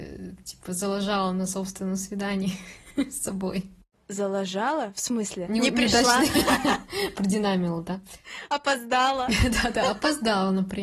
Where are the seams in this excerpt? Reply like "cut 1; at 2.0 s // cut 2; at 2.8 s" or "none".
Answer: cut 1; at 5.5 s